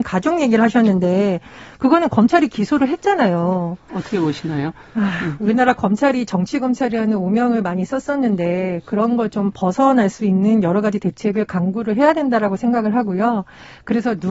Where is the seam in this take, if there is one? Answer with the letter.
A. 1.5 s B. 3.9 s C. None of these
B